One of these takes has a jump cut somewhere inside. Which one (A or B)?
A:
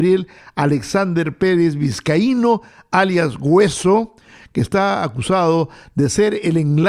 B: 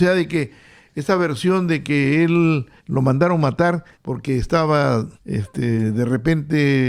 B